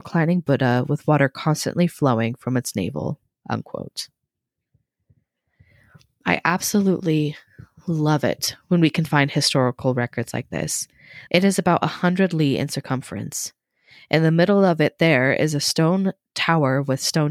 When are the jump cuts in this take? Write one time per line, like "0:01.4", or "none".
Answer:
0:11.3